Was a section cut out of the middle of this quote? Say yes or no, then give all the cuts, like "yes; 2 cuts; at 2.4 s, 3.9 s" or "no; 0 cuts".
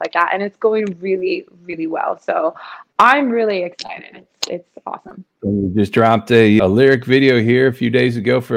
yes; 2 cuts; at 5.4 s, 6.6 s